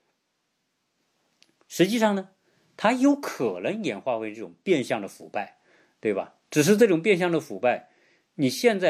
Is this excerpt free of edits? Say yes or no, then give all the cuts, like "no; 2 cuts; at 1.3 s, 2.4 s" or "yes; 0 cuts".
yes; 0 cuts